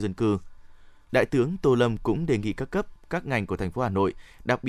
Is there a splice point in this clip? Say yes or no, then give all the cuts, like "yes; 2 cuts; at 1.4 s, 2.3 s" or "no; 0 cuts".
yes; 1 cut; at 1.1 s